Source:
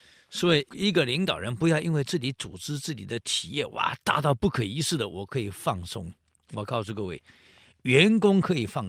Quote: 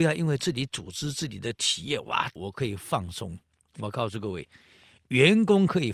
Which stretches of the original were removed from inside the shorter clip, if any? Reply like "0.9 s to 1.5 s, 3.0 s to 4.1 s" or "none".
4.0 s to 5.1 s